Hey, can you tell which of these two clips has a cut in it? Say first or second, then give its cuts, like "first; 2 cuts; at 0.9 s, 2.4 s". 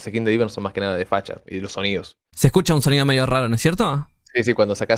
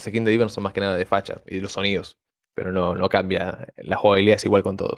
first; 1 cut; at 2.3 s